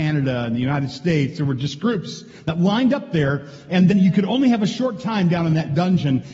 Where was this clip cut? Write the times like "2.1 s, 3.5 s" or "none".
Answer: 3.9 s